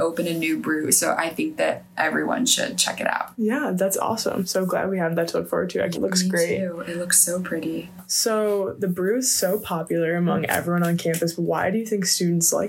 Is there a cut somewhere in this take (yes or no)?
yes